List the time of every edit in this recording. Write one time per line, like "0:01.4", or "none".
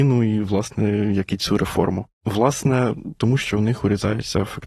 0:02.1
0:03.2